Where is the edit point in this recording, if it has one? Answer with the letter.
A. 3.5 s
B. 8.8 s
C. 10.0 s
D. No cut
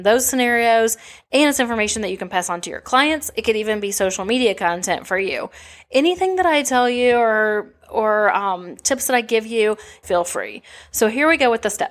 C